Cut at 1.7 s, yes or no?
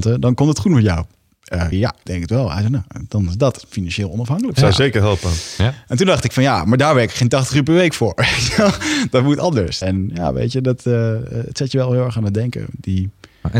yes